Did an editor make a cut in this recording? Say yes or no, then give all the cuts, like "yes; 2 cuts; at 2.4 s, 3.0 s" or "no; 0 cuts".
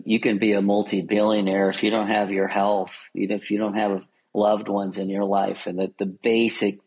no; 0 cuts